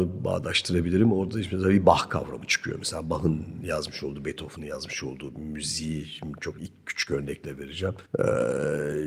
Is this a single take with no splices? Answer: no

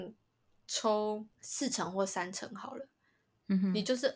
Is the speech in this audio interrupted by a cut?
no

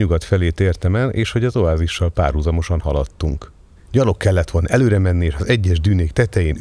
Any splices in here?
yes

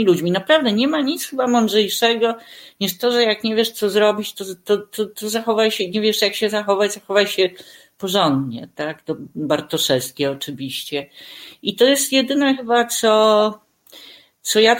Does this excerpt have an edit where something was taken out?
no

